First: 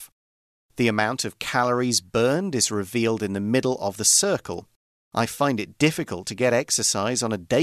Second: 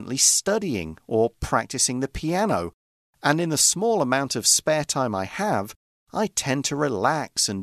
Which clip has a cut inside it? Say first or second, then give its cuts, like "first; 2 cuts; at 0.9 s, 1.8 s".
first; 1 cut; at 5.1 s